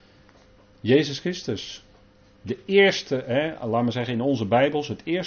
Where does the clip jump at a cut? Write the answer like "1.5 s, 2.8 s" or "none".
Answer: none